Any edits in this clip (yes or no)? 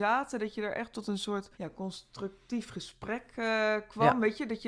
yes